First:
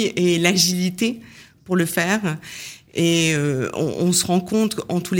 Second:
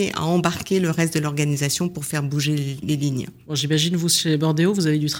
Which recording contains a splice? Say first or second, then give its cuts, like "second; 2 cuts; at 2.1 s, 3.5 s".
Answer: second; 1 cut; at 2.8 s